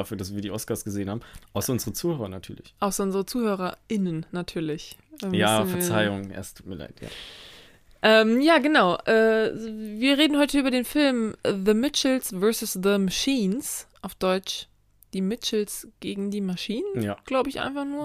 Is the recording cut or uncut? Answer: uncut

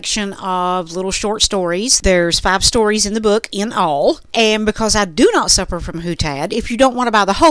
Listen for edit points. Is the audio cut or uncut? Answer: uncut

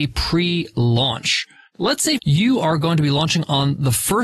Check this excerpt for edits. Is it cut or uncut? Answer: cut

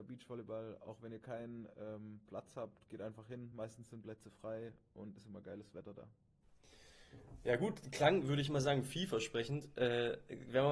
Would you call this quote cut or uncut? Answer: uncut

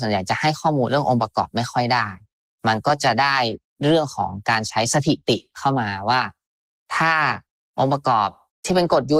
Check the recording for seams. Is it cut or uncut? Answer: uncut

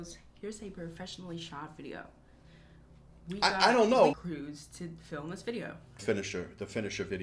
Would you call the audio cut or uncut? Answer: cut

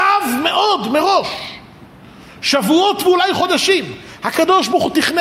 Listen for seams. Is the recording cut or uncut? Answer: uncut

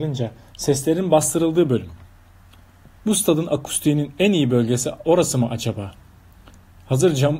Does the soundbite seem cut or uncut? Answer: cut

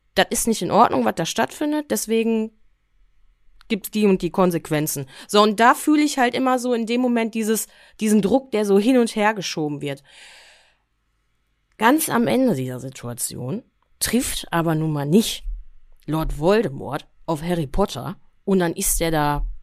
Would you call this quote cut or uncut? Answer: uncut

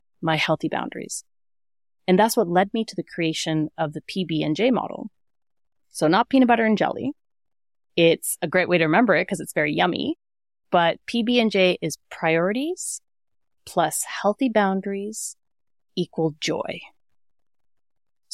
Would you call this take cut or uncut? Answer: uncut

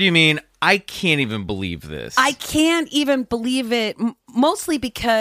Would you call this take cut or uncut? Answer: uncut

